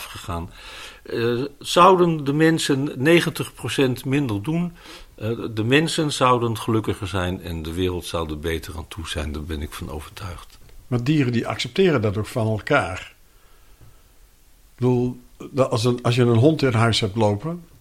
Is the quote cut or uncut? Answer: uncut